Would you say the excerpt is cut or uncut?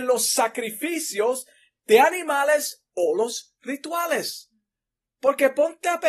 uncut